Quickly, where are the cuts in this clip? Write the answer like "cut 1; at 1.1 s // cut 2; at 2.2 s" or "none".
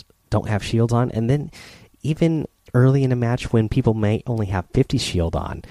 none